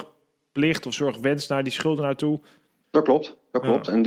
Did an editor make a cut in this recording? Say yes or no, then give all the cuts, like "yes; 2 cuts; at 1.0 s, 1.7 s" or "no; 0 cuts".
yes; 1 cut; at 2.8 s